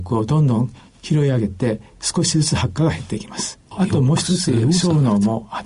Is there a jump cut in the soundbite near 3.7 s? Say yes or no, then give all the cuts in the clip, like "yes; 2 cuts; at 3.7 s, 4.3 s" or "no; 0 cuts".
yes; 1 cut; at 3.7 s